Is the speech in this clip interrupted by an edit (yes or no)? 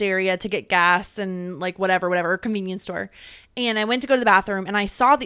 no